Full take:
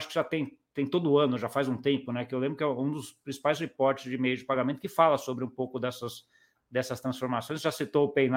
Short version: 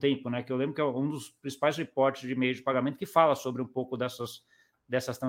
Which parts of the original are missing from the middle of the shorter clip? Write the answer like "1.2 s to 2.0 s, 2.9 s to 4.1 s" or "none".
none